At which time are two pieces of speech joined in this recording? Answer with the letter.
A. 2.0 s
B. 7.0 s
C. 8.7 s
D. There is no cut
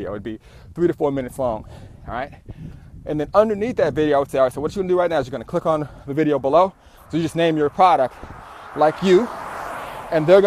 B